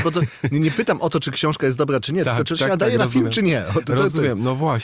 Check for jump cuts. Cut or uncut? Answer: uncut